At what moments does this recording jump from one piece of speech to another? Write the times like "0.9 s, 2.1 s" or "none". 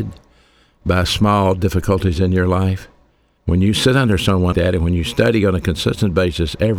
3.4 s, 4.5 s